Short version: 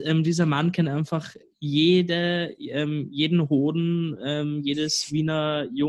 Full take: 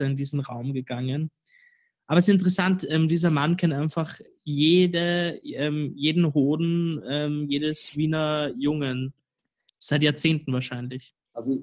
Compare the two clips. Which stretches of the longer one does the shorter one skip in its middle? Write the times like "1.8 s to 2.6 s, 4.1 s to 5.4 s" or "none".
none